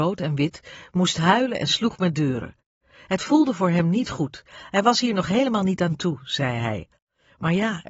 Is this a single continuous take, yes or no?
yes